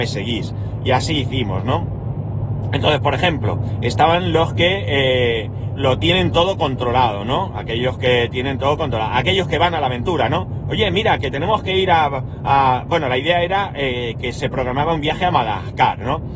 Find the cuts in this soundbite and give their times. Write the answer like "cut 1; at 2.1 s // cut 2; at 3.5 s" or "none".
cut 1; at 5.8 s